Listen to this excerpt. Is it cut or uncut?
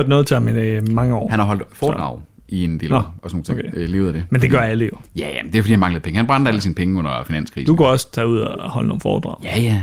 uncut